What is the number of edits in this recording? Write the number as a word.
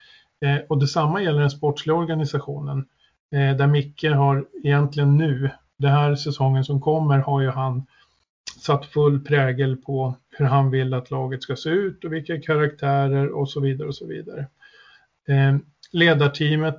zero